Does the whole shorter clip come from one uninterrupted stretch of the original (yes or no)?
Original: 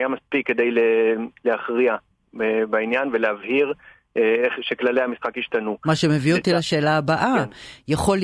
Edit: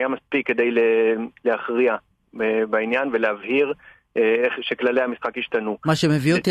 yes